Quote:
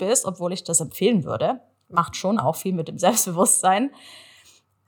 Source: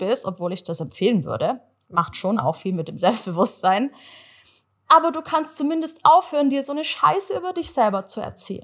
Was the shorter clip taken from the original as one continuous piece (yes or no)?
yes